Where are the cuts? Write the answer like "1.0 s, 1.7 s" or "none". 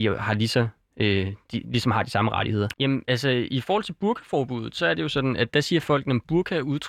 2.7 s